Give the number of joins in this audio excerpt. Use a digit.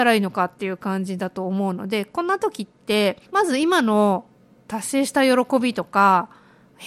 1